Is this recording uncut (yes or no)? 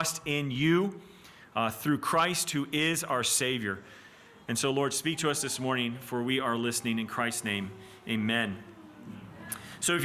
yes